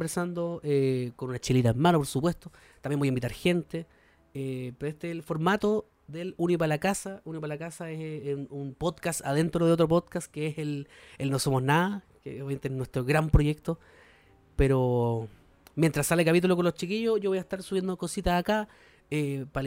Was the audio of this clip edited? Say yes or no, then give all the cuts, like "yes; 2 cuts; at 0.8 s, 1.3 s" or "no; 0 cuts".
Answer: no; 0 cuts